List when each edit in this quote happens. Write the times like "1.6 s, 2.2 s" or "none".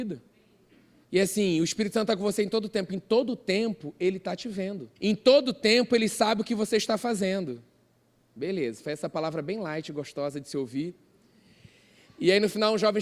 1.0 s, 5.0 s